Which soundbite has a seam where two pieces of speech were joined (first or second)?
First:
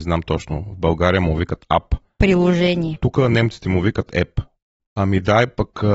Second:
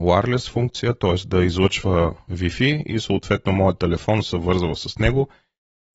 first